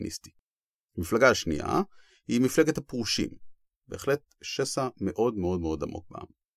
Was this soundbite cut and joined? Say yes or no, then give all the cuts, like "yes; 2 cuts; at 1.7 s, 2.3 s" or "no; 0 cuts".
yes; 1 cut; at 3.8 s